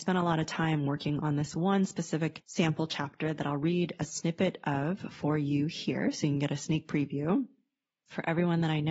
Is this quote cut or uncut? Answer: uncut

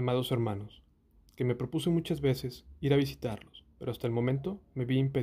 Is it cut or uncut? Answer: uncut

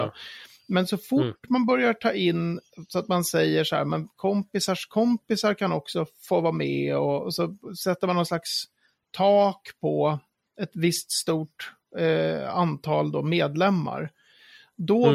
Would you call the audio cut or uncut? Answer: uncut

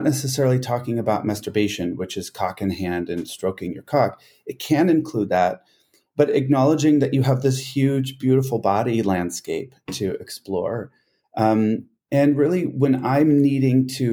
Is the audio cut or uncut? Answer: uncut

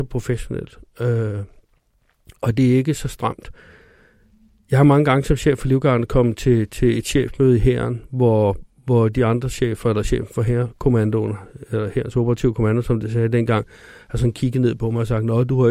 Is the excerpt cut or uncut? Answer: uncut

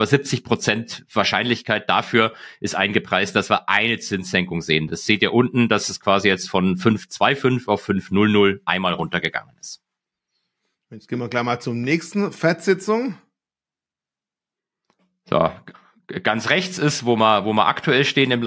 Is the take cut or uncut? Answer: uncut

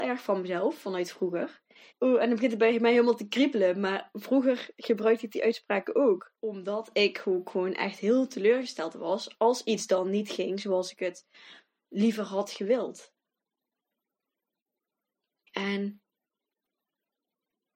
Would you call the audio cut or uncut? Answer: cut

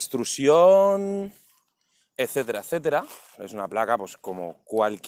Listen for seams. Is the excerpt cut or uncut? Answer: cut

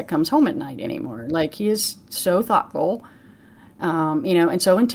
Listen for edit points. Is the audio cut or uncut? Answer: uncut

